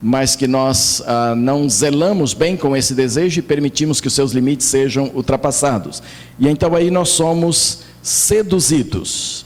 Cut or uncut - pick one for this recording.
uncut